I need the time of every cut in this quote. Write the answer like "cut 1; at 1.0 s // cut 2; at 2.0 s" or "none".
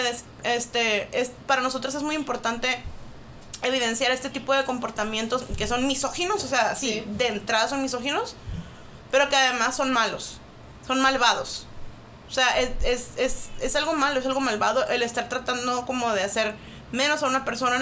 none